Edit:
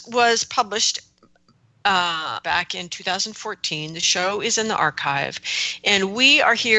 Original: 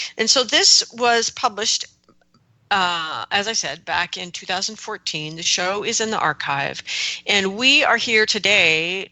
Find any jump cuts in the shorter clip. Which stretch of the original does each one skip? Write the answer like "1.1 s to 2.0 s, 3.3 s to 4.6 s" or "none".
3.3 s to 3.8 s

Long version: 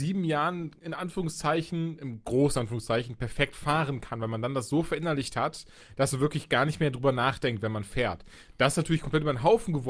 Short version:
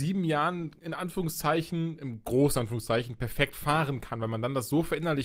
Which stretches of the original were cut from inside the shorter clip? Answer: none

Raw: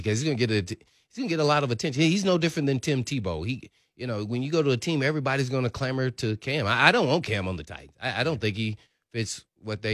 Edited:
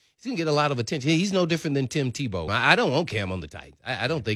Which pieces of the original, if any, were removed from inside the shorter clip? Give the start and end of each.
3.4 s to 6.6 s

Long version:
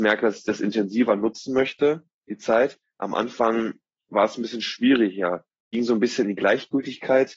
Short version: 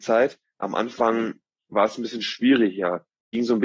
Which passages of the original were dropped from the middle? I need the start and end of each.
none

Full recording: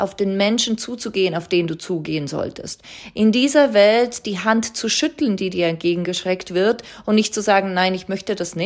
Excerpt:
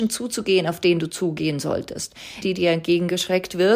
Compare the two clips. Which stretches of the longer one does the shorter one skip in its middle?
3.1 s to 5.4 s

